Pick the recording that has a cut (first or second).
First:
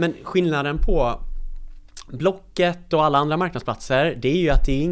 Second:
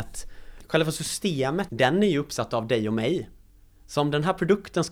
second